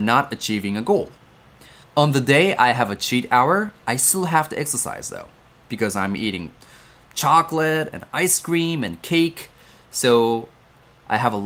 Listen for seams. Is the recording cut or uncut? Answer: cut